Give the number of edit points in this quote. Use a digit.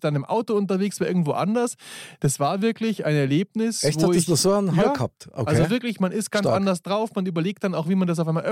0